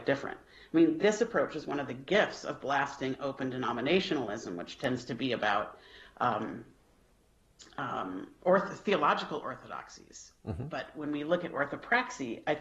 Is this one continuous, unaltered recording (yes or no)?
yes